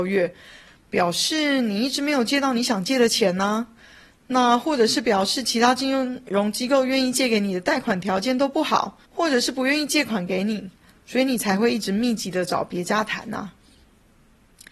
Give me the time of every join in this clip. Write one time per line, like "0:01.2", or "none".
0:09.1